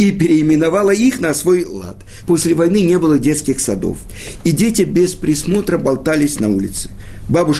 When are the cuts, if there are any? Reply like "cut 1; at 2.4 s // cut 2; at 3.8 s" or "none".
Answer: cut 1; at 2.2 s